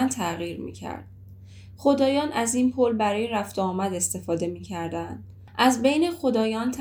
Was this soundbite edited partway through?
no; 0 cuts

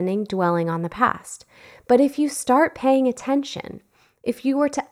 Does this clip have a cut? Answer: no; 0 cuts

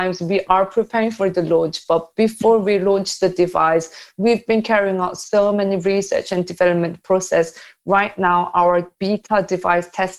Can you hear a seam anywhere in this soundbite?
no; 0 cuts

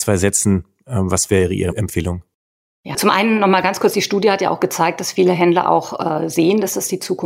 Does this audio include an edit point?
yes; 1 cut; at 2.9 s

